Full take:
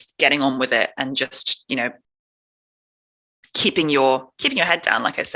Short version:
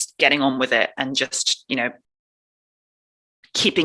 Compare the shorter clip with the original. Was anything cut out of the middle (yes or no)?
no